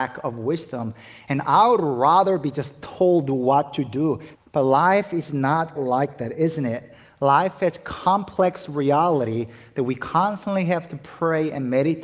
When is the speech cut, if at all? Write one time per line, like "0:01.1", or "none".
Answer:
0:04.3
0:05.8